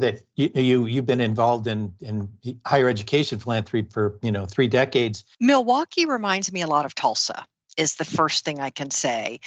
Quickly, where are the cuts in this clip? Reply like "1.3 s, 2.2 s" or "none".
5.3 s